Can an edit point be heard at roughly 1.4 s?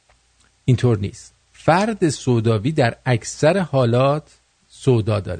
yes; 1 cut; at 1.4 s

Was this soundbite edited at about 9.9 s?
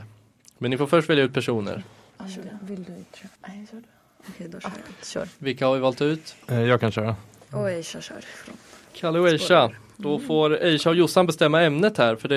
no; 2 cuts; at 3.4 s, 6.4 s

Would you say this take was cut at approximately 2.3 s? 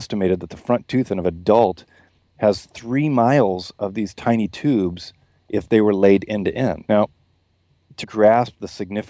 no; 2 cuts; at 6.9 s, 8.0 s

